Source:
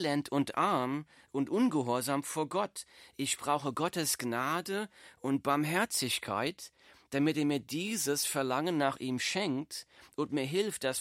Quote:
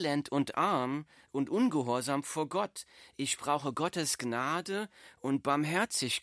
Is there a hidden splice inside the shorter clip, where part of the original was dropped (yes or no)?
no